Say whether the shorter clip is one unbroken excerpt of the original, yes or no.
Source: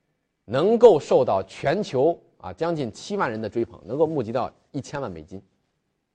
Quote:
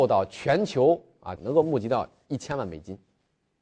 no